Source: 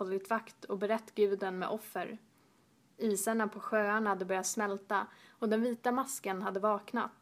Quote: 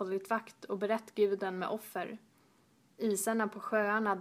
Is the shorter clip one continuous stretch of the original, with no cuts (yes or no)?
yes